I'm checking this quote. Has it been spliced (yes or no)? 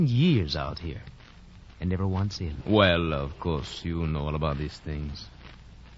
yes